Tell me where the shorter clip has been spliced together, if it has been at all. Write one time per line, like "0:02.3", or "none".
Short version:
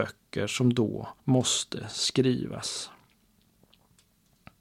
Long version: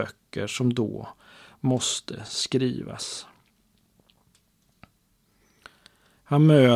0:01.2